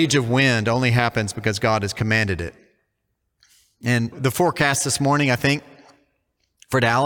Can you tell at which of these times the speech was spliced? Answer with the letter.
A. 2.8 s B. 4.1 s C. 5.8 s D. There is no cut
B